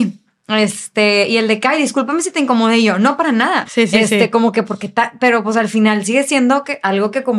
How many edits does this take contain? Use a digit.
2